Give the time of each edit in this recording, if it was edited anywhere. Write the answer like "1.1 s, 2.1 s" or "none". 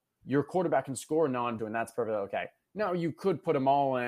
1.6 s